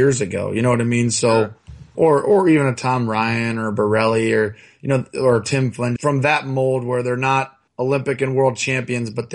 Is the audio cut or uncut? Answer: cut